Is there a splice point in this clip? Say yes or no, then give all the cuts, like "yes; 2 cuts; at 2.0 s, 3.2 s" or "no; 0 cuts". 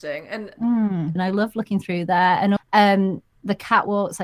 yes; 2 cuts; at 1.2 s, 2.6 s